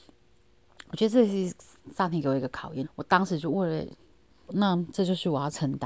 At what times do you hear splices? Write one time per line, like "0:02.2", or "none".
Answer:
0:02.8
0:04.5